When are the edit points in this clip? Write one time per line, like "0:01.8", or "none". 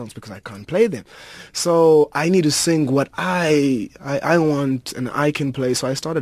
none